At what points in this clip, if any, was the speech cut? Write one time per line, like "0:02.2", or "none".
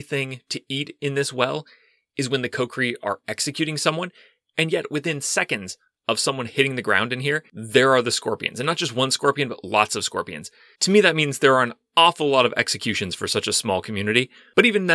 none